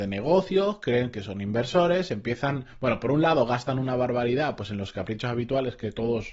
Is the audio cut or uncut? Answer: uncut